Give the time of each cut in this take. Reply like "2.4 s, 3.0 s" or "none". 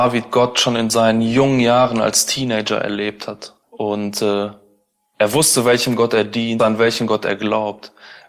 3.6 s, 6.6 s

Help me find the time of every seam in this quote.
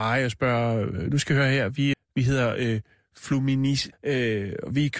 1.9 s, 3.9 s

